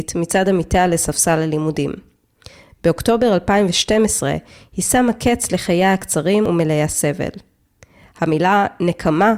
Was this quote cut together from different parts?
no; 0 cuts

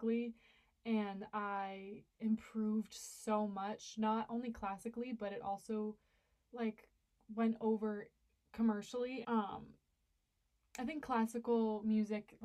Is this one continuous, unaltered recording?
no; 1 cut; at 9.2 s

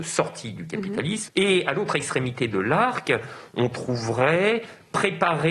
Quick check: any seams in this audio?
yes; 1 cut; at 1.3 s

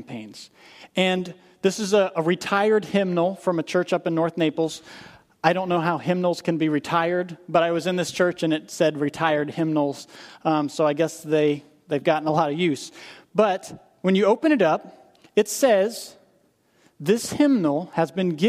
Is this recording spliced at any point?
no; 0 cuts

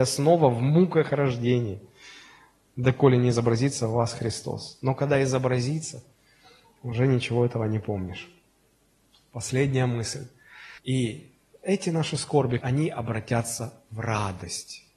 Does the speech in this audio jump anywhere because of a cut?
yes; 2 cuts; at 10.8 s, 12.6 s

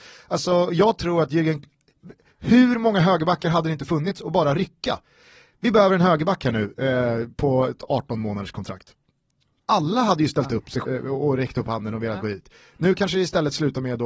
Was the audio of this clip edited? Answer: yes; 1 cut; at 10.8 s

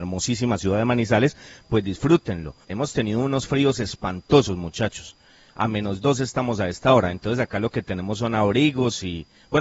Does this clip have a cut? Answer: yes; 1 cut; at 2.6 s

